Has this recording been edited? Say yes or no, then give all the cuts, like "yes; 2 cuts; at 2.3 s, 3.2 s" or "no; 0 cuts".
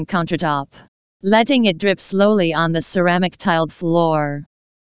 no; 0 cuts